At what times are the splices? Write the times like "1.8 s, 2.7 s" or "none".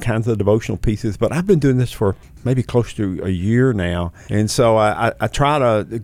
4.3 s